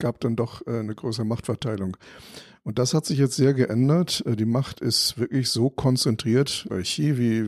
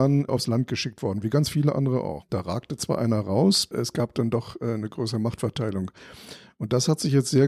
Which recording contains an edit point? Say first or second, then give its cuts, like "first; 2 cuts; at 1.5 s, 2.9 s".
second; 2 cuts; at 2.2 s, 3.7 s